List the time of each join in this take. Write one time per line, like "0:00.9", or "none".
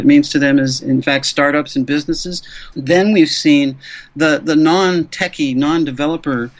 0:02.7